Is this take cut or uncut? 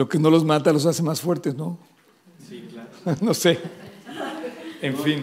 uncut